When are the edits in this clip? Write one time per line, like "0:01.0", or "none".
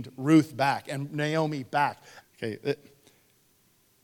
0:02.2